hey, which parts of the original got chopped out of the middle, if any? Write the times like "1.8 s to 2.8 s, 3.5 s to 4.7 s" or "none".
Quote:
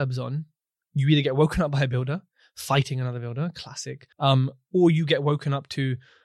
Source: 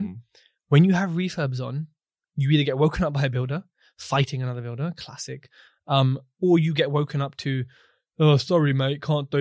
5.5 s to 5.8 s